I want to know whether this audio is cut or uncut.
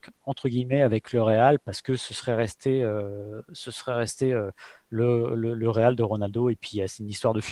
uncut